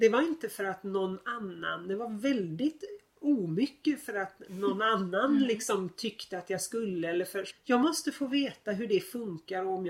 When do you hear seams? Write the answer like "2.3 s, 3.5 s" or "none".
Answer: 7.5 s